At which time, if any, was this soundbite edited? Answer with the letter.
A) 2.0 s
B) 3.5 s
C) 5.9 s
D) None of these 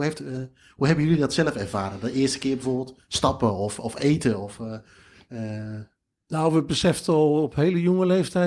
D